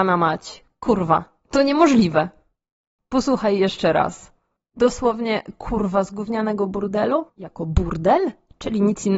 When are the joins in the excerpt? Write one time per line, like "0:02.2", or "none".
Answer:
0:04.7
0:07.3